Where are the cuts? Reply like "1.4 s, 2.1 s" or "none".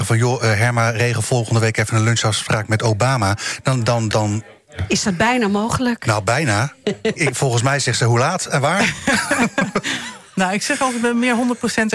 4.1 s, 7.2 s